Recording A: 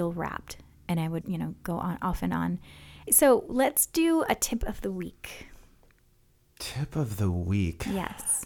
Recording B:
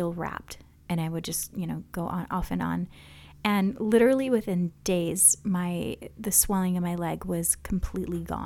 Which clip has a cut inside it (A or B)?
A